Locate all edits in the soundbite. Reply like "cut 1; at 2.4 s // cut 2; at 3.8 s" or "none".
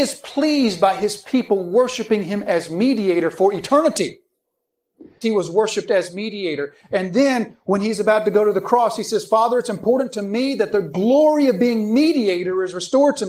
cut 1; at 5.2 s